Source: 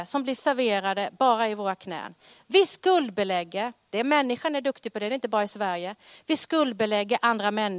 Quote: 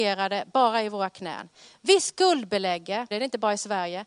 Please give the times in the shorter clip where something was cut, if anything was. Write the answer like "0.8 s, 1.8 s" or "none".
3.1 s